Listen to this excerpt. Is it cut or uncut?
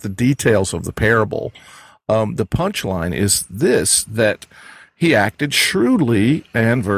uncut